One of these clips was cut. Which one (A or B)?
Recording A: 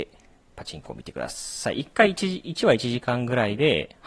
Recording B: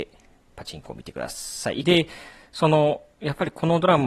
B